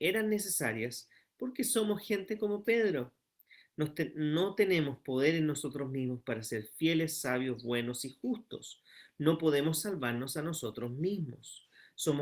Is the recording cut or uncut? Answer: uncut